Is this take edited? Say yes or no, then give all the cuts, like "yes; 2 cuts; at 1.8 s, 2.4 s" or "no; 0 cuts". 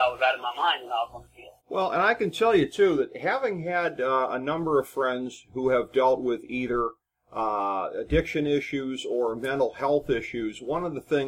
yes; 1 cut; at 1.6 s